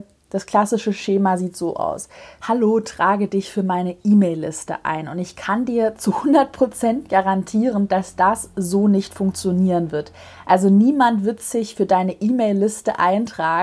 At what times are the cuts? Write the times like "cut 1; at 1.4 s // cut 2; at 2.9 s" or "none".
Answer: cut 1; at 2.4 s